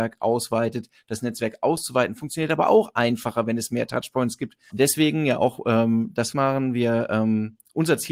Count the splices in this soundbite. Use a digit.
2